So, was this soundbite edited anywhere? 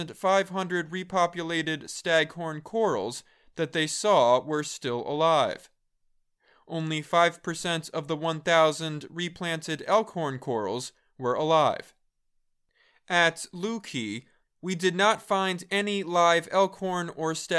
yes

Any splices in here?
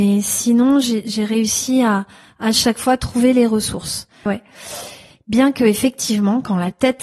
yes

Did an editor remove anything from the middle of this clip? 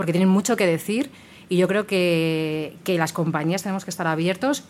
no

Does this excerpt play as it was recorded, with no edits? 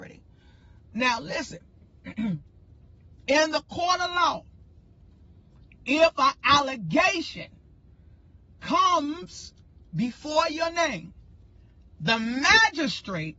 yes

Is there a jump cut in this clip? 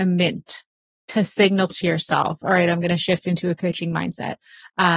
no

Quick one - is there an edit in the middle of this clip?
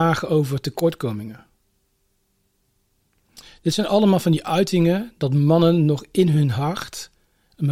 no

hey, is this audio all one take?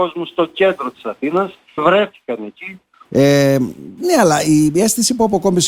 no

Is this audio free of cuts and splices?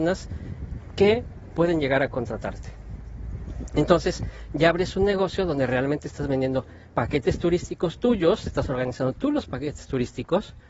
yes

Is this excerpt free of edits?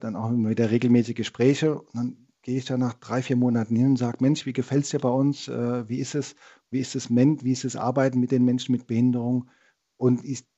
yes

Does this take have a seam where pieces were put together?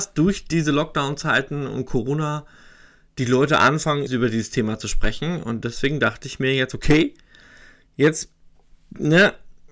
yes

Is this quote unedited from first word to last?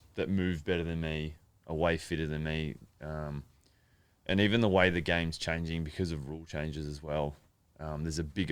yes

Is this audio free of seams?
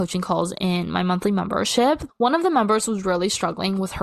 no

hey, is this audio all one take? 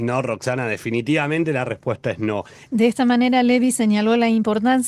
no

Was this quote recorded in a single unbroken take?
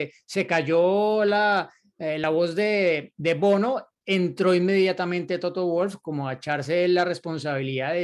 yes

